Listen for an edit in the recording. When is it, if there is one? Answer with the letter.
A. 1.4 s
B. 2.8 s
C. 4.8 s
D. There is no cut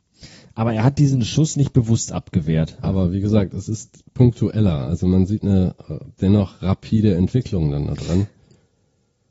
B